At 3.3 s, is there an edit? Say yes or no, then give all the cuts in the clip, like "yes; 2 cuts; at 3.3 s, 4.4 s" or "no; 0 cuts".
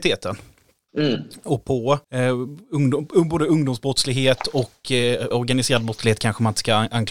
no; 2 cuts; at 2.0 s, 5.3 s